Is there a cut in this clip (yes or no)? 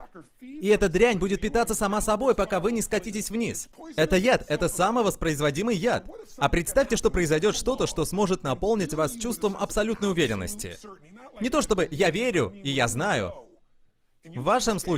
no